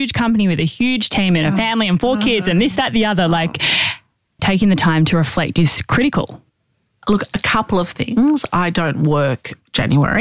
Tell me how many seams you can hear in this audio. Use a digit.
1